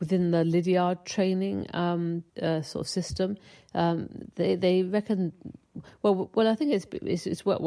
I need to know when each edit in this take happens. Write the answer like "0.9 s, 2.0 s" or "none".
2.3 s